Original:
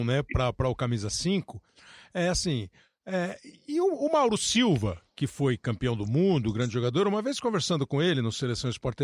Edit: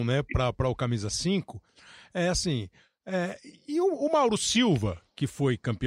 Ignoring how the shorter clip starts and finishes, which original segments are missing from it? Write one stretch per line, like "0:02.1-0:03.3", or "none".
none

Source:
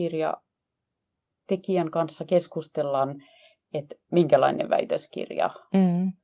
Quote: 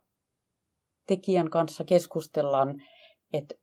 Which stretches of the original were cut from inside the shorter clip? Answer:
none

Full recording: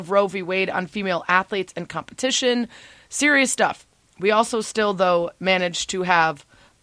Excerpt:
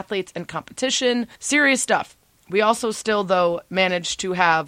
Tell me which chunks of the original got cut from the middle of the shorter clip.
0:02.8-0:03.0

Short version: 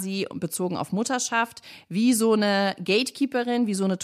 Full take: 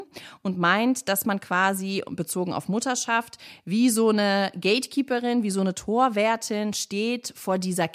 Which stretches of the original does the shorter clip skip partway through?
none

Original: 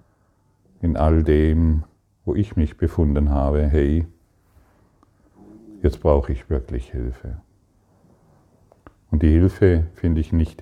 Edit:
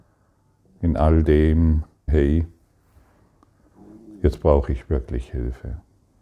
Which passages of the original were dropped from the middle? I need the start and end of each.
0:02.1-0:03.7

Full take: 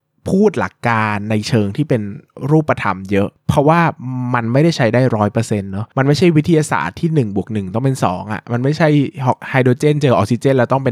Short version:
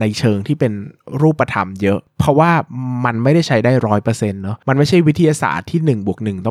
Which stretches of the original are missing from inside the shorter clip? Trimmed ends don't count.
none

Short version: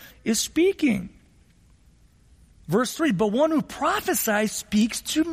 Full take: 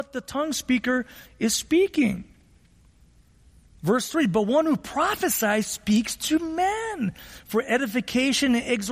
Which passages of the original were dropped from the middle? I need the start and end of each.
none

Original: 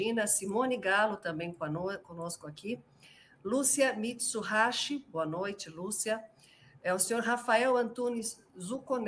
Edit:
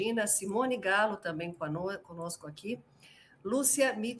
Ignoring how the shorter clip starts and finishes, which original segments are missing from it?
none

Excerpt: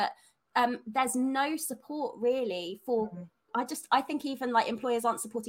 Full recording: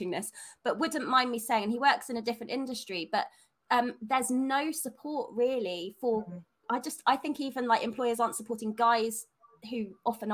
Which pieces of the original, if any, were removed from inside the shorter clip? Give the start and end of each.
none

